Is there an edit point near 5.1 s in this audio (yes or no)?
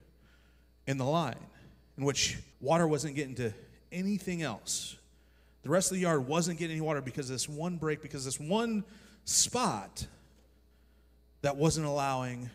no